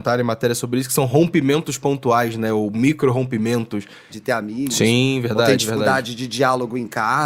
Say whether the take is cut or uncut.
cut